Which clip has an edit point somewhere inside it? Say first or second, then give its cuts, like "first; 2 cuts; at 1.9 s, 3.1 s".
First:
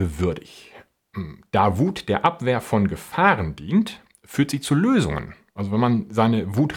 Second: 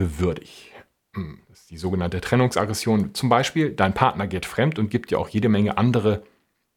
second; 1 cut; at 1.4 s